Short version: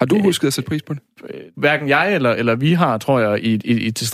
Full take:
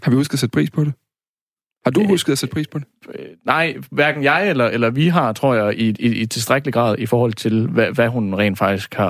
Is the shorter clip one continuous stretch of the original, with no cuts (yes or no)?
no